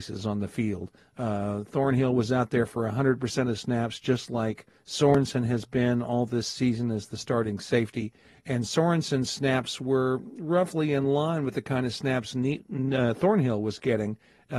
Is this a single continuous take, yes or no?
yes